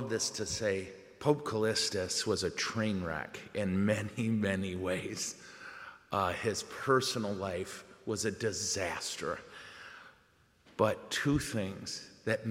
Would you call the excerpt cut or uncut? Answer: uncut